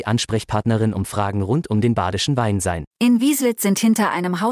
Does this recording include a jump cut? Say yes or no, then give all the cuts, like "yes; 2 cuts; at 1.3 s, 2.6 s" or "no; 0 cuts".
yes; 1 cut; at 2.9 s